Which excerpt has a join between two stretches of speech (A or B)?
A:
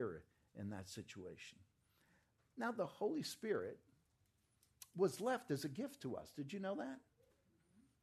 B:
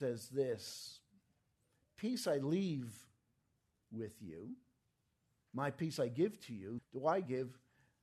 B